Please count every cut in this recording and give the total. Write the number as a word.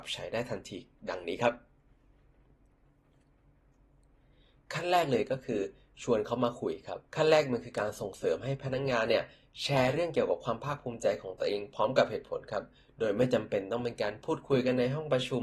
one